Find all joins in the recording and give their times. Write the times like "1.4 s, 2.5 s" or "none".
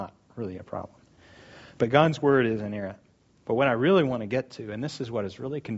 none